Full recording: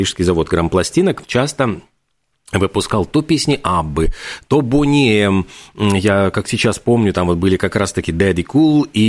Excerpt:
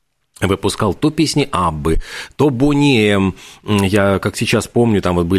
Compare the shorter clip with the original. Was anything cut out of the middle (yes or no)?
no